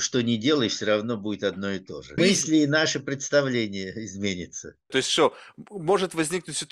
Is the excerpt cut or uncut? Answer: cut